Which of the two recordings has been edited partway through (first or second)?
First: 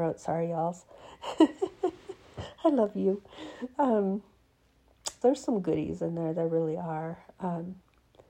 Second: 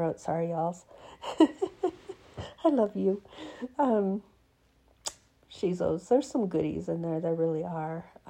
first